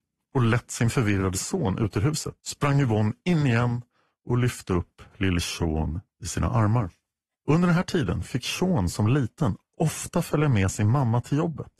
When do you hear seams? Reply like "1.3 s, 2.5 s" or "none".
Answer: 2.4 s, 7.3 s